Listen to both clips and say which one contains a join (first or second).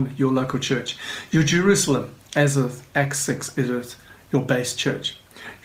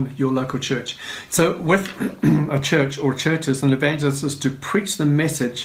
second